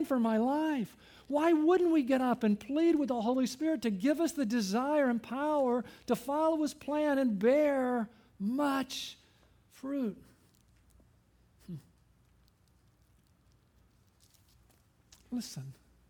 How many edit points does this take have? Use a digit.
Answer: 0